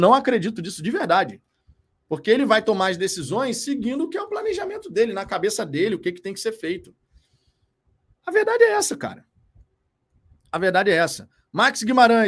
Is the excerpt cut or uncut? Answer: cut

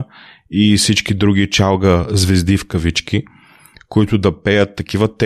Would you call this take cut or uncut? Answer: uncut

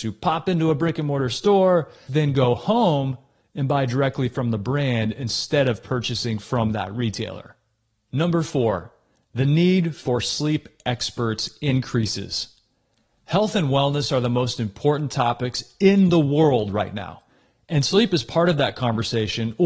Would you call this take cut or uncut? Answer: cut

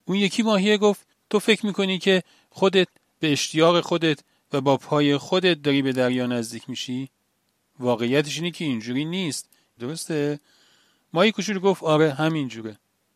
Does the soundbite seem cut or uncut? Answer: cut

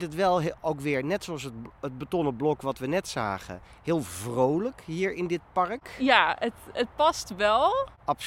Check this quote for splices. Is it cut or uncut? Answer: uncut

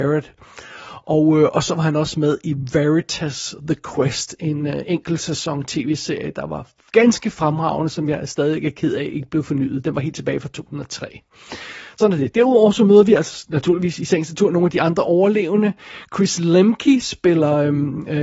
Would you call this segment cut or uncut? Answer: cut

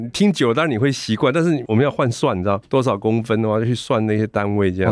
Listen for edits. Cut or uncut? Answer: cut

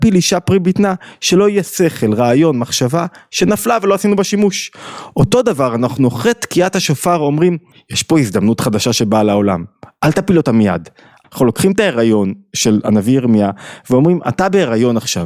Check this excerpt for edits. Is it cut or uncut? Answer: cut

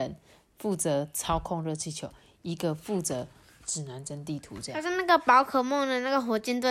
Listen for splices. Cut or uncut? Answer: uncut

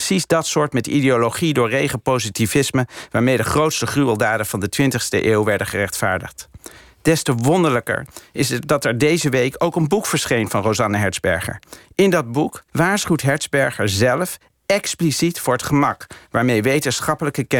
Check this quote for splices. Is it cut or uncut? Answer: cut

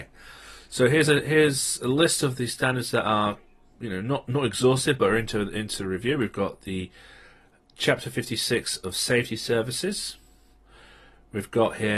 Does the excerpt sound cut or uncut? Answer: uncut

